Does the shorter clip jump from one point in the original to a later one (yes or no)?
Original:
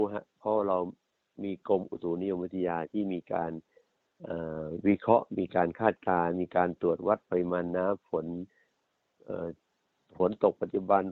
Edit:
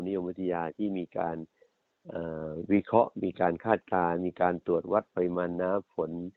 no